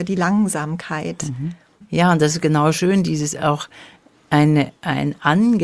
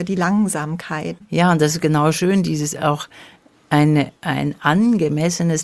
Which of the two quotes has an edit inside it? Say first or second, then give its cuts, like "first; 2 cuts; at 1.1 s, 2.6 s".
second; 1 cut; at 1.2 s